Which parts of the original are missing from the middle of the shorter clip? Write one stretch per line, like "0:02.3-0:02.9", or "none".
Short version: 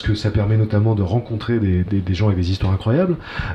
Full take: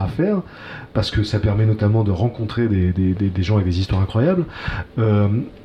0:02.9-0:03.1